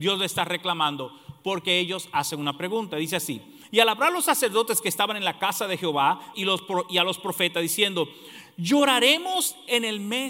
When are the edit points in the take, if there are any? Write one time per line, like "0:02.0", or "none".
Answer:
0:06.3